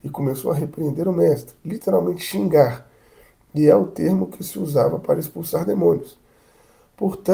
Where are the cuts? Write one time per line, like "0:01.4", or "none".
none